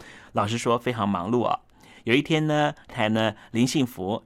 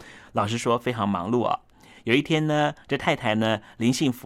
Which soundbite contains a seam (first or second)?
first